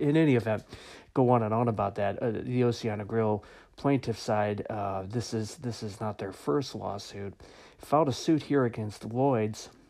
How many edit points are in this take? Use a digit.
0